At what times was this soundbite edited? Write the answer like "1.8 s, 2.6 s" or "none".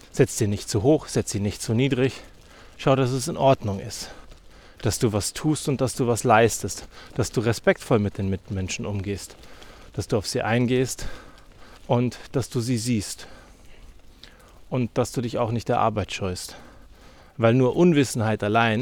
11.8 s